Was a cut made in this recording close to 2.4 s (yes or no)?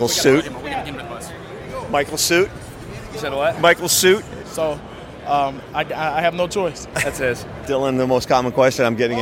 no